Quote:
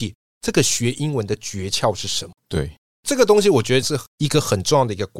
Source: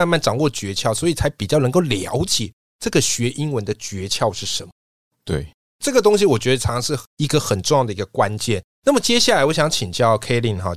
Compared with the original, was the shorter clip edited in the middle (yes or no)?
yes